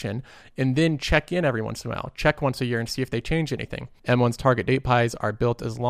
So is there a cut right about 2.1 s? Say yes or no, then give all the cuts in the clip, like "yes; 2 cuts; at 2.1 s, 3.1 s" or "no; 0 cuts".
no; 1 cut; at 4.0 s